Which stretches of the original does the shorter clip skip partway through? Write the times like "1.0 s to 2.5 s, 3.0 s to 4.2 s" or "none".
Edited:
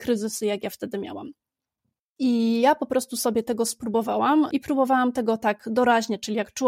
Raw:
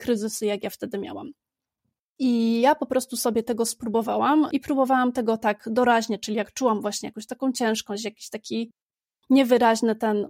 none